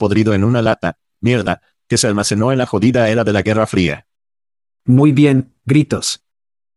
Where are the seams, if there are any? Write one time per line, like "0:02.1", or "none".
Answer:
none

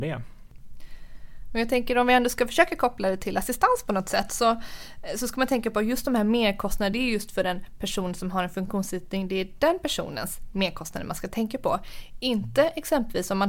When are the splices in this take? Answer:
none

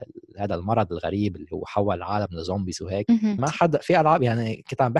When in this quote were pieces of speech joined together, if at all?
0:03.4

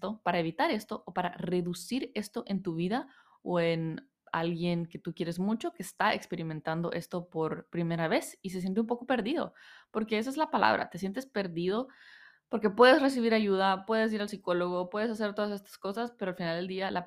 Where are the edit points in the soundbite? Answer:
none

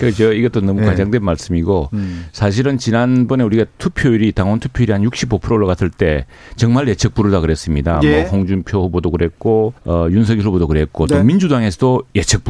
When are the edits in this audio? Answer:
0:09.8

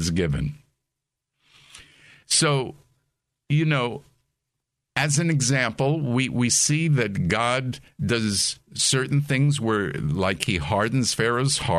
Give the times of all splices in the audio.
none

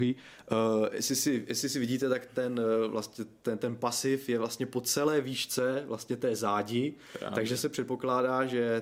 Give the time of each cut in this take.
none

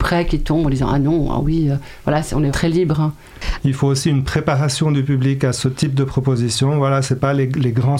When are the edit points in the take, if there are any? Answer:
0:02.5
0:03.6

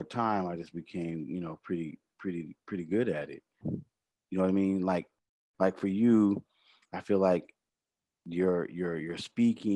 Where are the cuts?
0:03.6

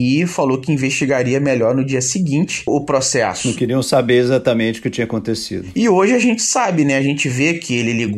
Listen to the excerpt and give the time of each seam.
0:02.7

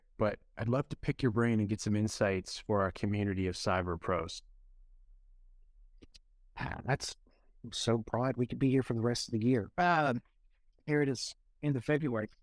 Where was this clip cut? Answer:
none

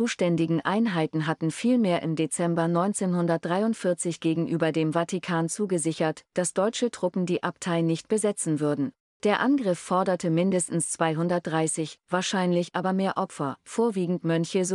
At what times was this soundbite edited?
0:09.1

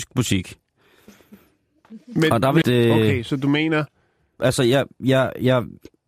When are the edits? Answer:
0:02.6
0:04.4

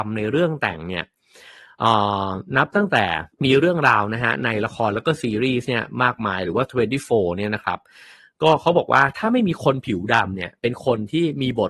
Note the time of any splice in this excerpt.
0:03.3

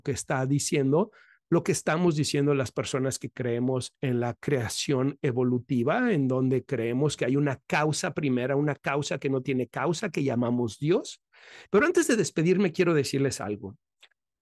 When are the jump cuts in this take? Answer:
0:11.7

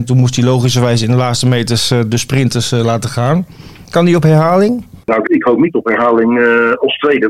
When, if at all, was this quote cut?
0:03.8
0:05.3

